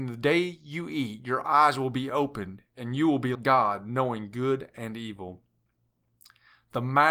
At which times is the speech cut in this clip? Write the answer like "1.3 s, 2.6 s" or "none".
3.3 s

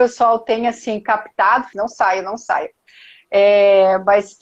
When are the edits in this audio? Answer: 1.7 s

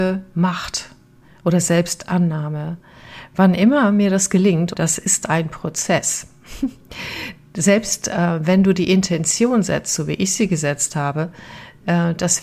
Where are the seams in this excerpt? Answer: 4.7 s

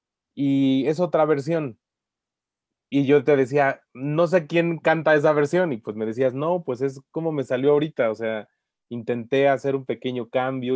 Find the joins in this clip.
none

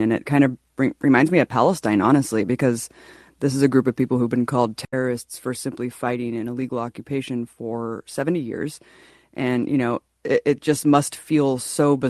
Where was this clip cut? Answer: none

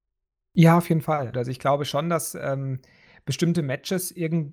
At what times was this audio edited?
1.3 s

